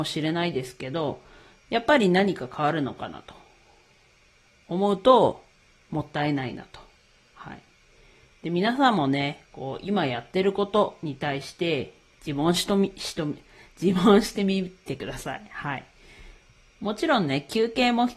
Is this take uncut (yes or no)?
yes